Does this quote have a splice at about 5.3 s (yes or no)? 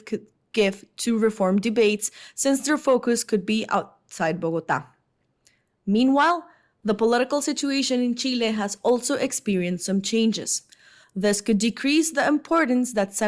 no